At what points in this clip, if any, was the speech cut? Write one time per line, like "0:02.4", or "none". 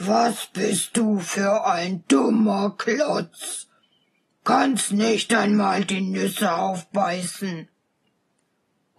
none

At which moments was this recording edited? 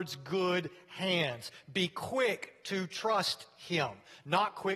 none

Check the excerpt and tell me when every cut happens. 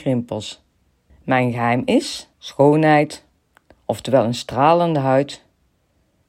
0:01.1
0:02.3

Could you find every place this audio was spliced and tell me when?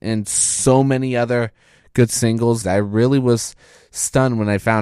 0:02.6

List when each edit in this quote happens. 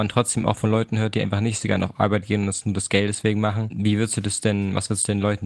none

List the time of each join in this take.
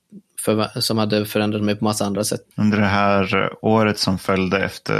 0:02.5

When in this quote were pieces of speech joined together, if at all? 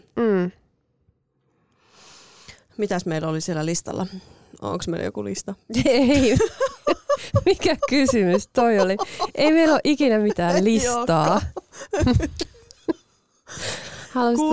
none

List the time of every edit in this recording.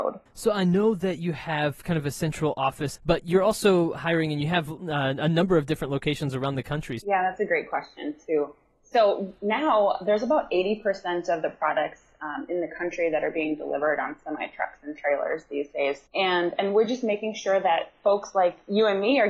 0:02.9
0:07.0
0:16.1

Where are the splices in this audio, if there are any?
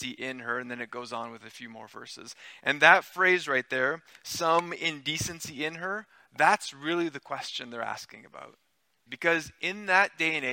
0:09.1

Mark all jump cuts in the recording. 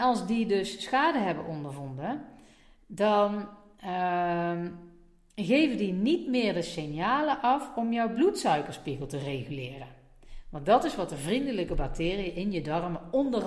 none

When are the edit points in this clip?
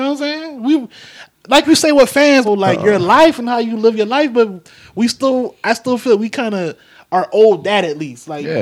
0:02.4

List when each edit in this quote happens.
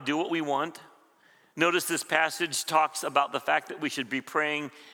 none

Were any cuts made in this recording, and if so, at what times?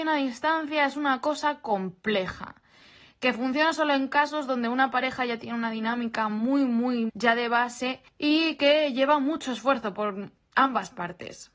0:07.1

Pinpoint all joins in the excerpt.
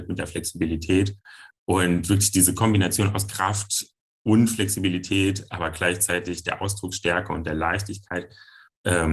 0:01.5

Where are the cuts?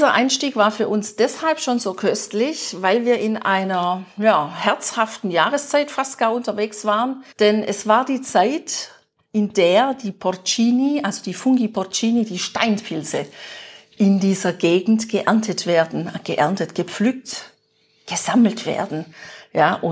0:07.3

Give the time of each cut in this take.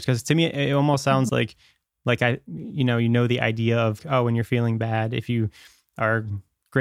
0:01.3
0:04.0

